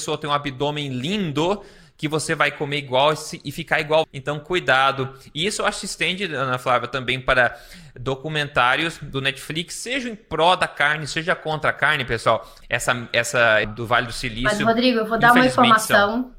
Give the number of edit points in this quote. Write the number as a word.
three